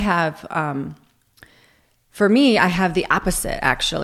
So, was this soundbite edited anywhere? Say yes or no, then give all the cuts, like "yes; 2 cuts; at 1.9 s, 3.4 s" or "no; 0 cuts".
no; 0 cuts